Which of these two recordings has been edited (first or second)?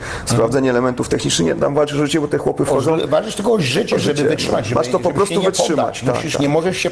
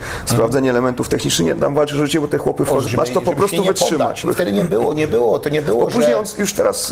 second